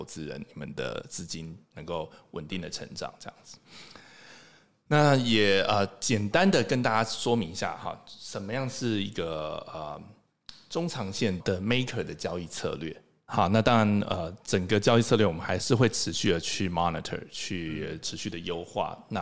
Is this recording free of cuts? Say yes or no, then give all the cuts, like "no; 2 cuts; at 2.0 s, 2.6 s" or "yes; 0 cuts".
no; 1 cut; at 13.3 s